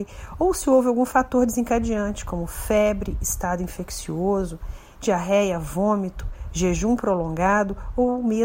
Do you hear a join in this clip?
no; 0 cuts

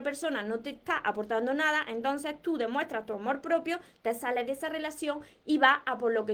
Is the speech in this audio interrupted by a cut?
no; 0 cuts

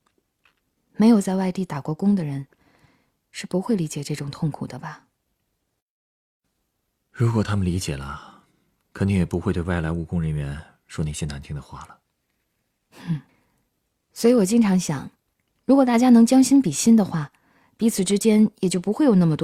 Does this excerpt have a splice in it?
no; 0 cuts

